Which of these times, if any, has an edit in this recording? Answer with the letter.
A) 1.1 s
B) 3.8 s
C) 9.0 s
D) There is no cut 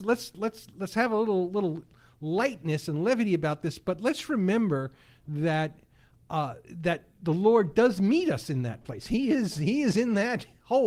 D